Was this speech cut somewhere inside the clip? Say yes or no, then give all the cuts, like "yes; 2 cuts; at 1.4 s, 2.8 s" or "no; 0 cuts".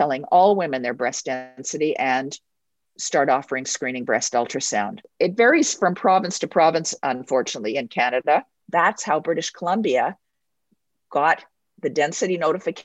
yes; 1 cut; at 8.6 s